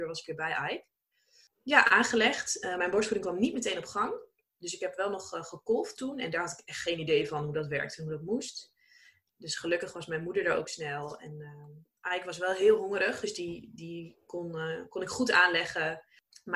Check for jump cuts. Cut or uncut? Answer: uncut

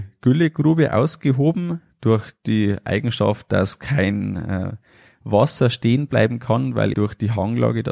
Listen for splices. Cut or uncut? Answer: cut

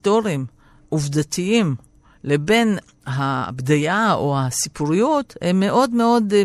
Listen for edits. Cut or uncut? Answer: uncut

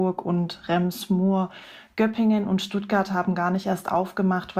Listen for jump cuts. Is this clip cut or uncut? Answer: uncut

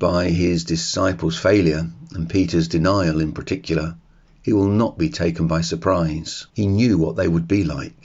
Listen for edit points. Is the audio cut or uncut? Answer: cut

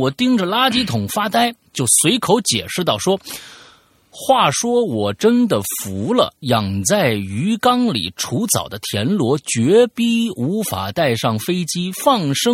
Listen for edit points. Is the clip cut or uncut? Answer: cut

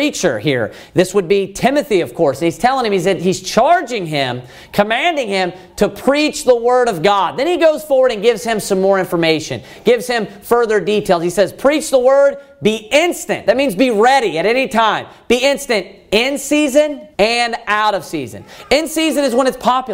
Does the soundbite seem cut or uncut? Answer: cut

